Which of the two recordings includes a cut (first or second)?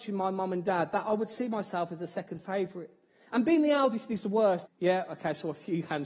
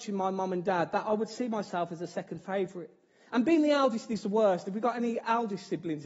first